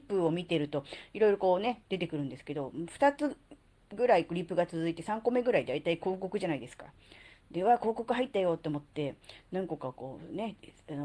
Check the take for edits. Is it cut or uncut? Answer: uncut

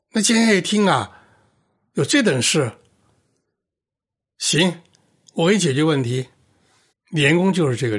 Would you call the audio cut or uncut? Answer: cut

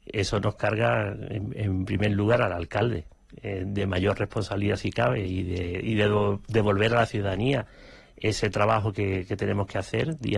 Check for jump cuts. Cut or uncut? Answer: uncut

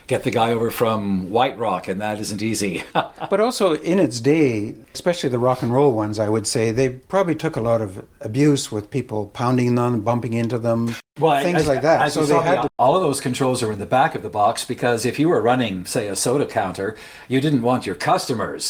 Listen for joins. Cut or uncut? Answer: cut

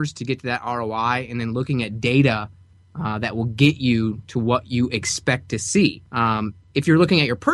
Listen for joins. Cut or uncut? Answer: cut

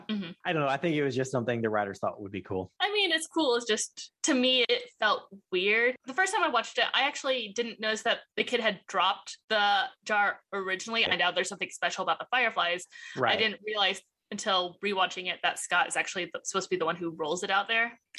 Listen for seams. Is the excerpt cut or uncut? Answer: cut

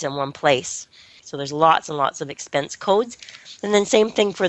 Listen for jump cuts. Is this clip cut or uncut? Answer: cut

